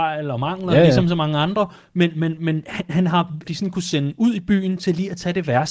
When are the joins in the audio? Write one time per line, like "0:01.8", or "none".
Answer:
0:03.4